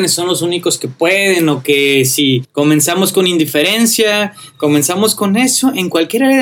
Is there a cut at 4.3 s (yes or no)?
no